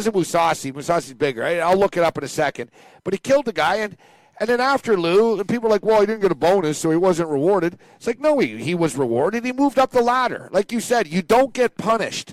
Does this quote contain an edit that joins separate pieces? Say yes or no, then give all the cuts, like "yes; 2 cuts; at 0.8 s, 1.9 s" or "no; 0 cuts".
no; 0 cuts